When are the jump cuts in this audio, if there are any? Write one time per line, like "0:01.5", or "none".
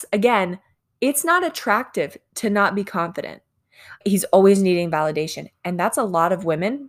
0:04.0